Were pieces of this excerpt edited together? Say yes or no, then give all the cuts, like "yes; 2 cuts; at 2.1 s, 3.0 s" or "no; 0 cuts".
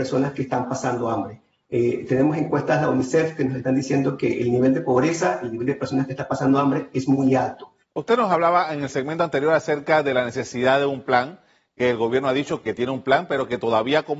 yes; 1 cut; at 7.8 s